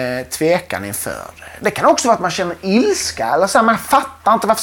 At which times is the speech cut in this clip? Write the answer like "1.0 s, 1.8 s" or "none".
none